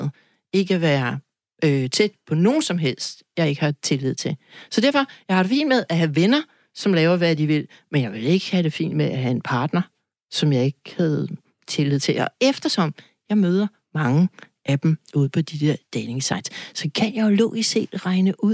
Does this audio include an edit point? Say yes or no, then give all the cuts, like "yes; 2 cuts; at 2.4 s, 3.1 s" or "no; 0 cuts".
no; 0 cuts